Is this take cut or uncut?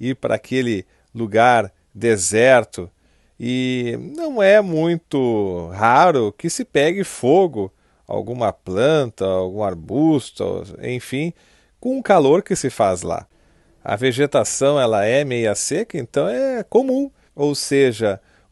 cut